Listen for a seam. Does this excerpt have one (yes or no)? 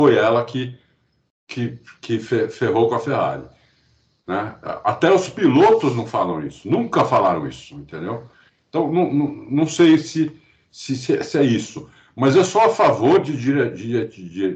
no